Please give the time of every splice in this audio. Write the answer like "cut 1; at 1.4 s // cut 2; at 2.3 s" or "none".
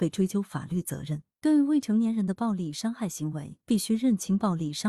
cut 1; at 1.4 s // cut 2; at 3.6 s

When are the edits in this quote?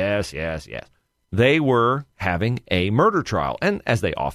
cut 1; at 1.1 s

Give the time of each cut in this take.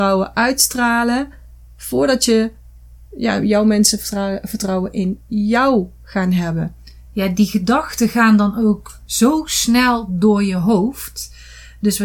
none

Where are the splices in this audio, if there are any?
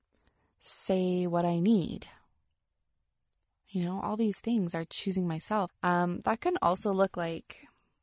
cut 1; at 5.7 s

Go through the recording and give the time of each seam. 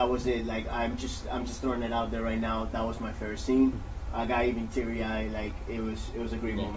none

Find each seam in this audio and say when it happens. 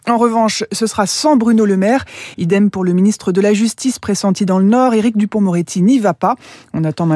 cut 1; at 2.3 s

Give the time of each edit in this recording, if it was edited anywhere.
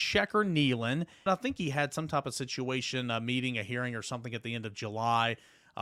cut 1; at 1.3 s

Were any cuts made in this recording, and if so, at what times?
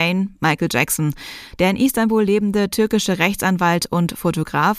cut 1; at 1.6 s

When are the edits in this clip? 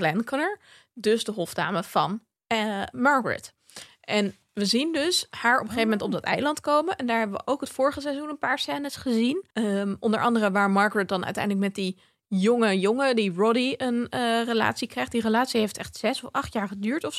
cut 1; at 9.5 s

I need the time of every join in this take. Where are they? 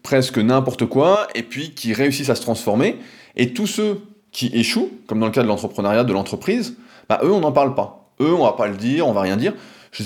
none

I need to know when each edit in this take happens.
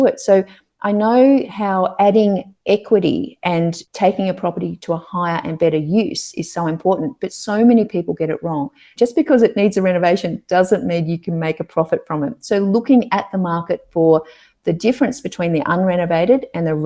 cut 1; at 9.0 s

